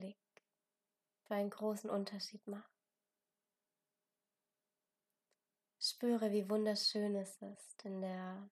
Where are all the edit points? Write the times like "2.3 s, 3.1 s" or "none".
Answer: 1.3 s